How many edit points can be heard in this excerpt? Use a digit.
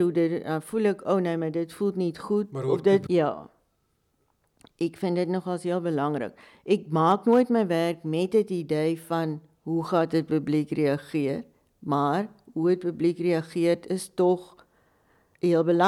1